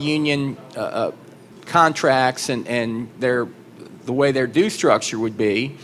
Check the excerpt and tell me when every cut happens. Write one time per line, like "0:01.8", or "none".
none